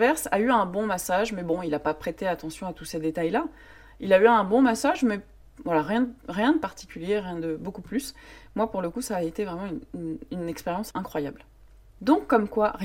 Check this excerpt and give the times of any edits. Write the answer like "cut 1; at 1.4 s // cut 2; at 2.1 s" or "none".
none